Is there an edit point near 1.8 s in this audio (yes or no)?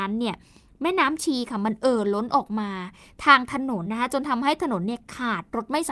no